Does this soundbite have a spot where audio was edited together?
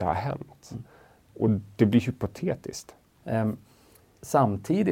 yes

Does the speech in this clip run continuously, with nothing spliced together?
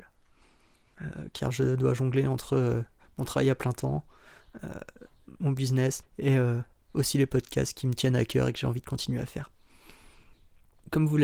no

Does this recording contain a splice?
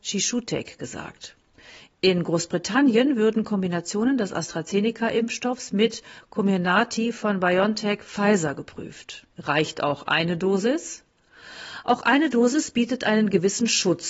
yes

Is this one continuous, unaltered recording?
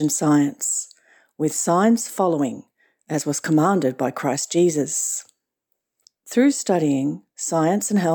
yes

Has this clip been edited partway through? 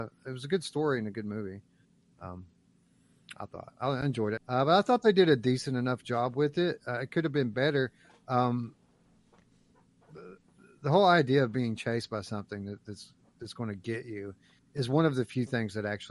yes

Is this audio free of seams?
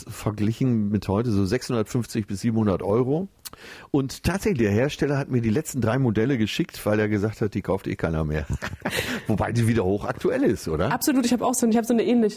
yes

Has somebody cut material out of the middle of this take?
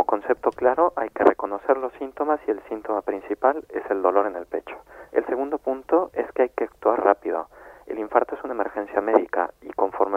yes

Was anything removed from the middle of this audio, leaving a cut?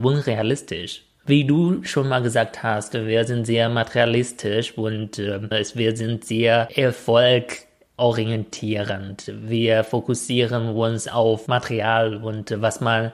yes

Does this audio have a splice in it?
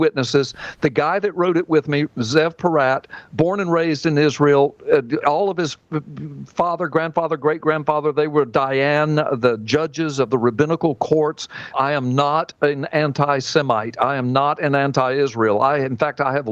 yes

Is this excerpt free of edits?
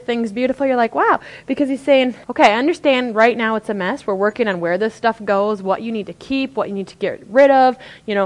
no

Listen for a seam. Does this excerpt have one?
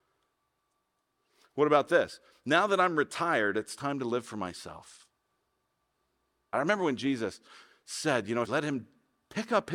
yes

